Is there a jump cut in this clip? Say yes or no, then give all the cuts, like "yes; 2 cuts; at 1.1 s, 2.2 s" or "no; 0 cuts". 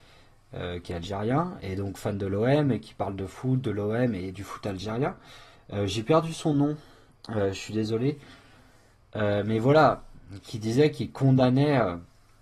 no; 0 cuts